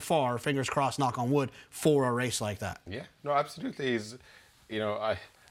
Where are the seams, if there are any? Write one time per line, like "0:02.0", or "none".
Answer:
none